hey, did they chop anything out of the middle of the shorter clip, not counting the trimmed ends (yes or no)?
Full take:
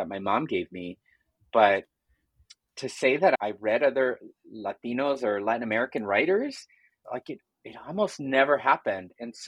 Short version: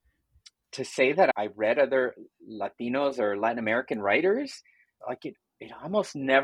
no